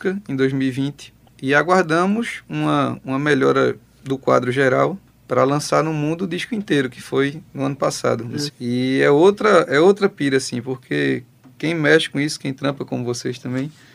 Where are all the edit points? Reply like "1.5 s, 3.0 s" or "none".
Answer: 8.5 s